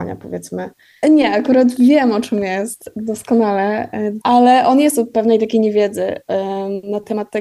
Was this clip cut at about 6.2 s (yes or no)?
no